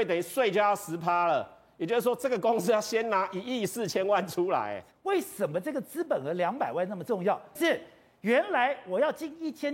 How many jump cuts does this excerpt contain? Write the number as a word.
two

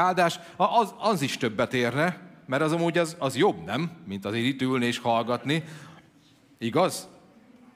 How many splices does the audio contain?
zero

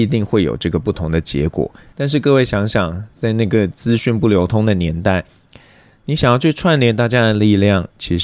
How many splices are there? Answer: one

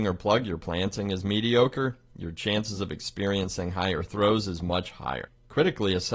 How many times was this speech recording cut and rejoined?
zero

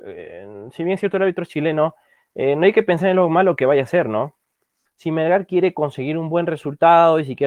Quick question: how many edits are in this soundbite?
one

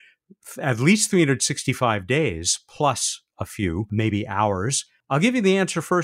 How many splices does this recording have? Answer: zero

